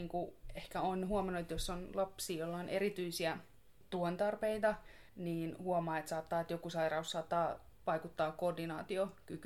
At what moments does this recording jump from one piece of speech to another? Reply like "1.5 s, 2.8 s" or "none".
5.1 s, 7.8 s